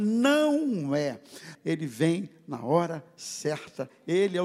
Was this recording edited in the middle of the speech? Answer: yes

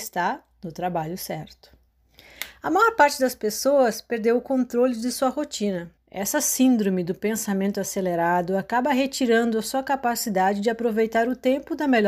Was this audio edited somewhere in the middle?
yes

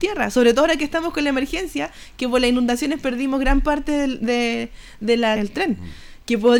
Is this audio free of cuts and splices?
no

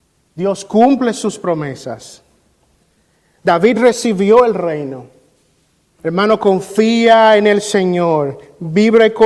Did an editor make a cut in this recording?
yes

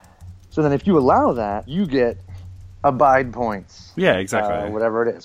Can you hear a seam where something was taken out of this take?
yes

